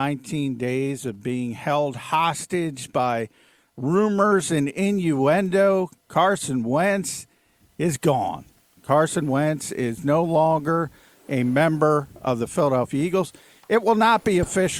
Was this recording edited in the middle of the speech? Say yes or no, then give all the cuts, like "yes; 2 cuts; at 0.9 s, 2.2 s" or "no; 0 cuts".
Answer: no; 0 cuts